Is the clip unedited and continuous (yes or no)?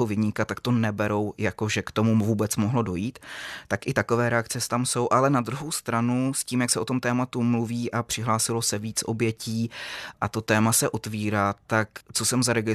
yes